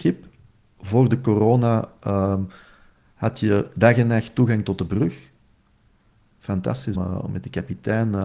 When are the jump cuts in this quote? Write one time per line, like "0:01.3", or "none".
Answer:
0:06.9